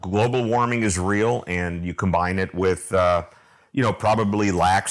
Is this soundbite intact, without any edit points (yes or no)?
yes